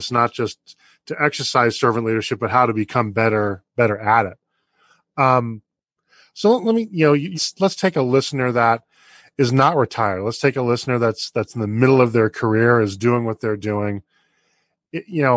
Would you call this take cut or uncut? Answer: cut